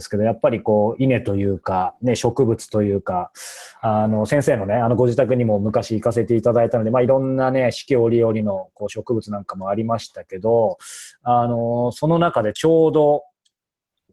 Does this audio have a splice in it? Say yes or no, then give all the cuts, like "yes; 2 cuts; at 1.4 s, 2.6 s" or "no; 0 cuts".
no; 0 cuts